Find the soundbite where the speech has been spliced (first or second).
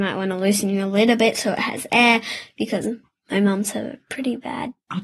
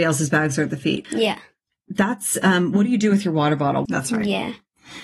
second